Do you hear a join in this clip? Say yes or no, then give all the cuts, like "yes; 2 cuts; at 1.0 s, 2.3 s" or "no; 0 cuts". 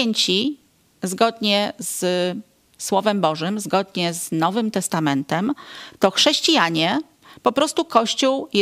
no; 0 cuts